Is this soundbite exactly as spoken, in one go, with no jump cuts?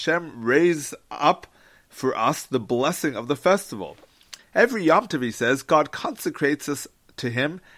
no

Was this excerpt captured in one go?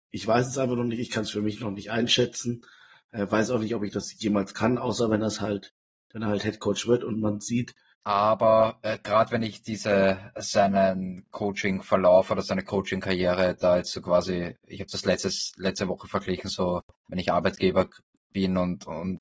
no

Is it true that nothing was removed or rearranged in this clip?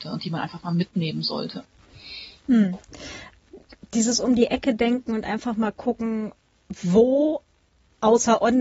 yes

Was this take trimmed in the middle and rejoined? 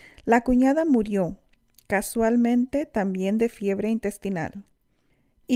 no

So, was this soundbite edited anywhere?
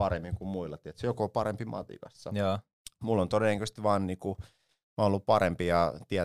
no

